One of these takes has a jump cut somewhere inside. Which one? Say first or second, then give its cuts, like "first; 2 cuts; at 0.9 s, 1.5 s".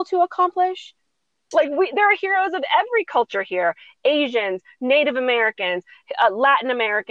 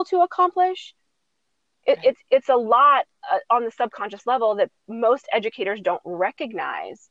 first; 1 cut; at 1.5 s